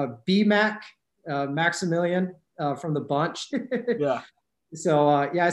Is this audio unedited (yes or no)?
no